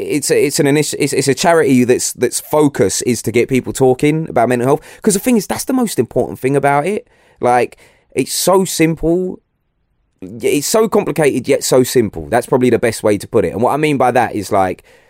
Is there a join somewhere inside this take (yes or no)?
no